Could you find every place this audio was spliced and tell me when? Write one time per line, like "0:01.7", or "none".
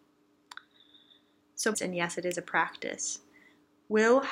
0:01.7

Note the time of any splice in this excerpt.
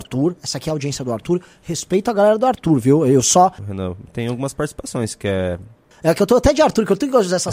0:03.6
0:05.9

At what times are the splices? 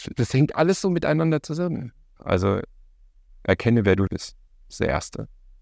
0:02.2
0:04.1

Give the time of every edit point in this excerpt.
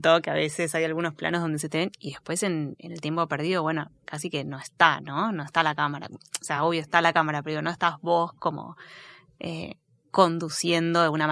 none

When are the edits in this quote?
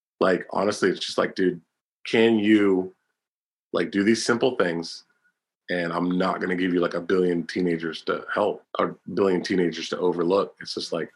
0:08.6

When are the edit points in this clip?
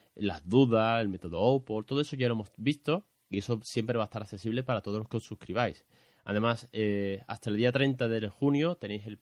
none

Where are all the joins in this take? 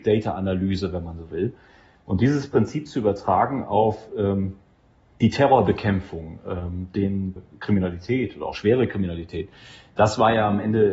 0:07.4

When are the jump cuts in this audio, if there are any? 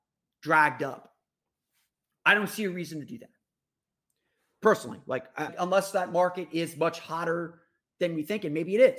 0:05.5

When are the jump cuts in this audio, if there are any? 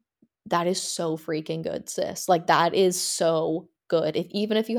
none

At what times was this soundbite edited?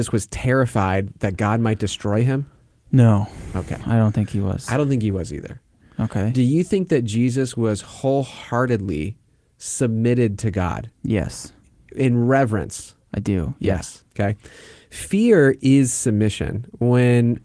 none

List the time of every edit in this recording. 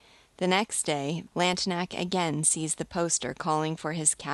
0:01.3

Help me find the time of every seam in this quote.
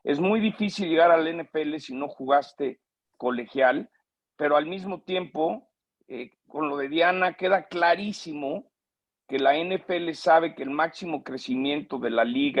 none

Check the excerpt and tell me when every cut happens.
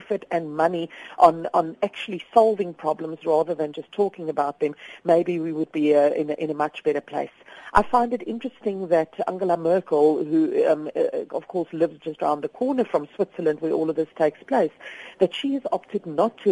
none

